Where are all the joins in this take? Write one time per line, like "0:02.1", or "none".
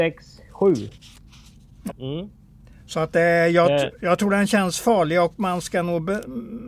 0:01.9